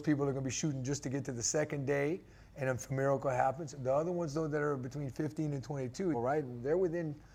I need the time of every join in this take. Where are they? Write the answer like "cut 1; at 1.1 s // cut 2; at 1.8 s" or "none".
cut 1; at 6.1 s

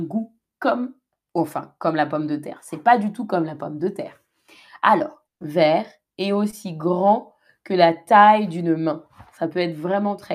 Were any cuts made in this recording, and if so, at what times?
cut 1; at 5.3 s

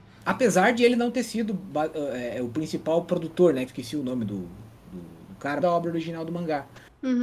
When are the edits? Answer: cut 1; at 3.7 s // cut 2; at 5.6 s

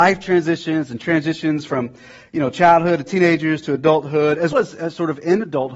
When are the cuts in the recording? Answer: cut 1; at 4.5 s

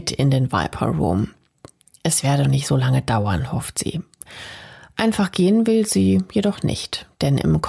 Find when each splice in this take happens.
cut 1; at 2.4 s

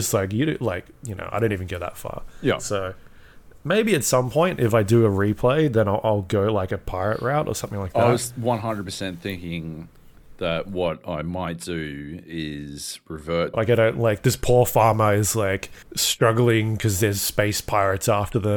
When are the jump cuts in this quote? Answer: cut 1; at 13.5 s // cut 2; at 15.8 s

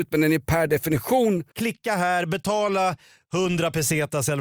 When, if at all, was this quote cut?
cut 1; at 1.5 s

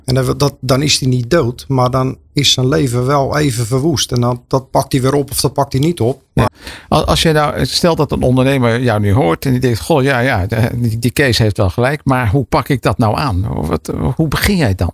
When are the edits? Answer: cut 1; at 6.5 s

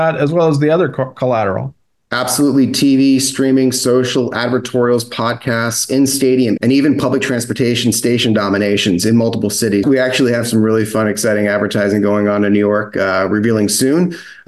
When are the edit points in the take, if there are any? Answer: cut 1; at 6.6 s // cut 2; at 9.8 s

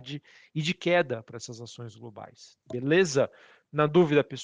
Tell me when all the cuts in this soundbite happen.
cut 1; at 2.6 s

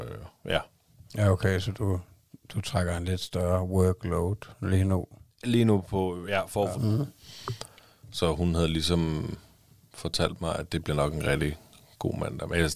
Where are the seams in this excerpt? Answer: cut 1; at 6.7 s

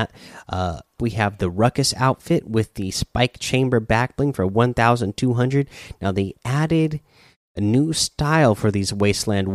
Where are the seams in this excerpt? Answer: cut 1; at 1.0 s

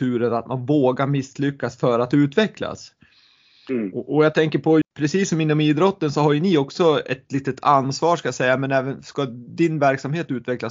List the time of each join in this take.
cut 1; at 4.8 s

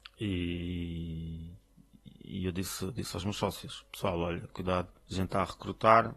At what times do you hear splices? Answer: cut 1; at 5.0 s

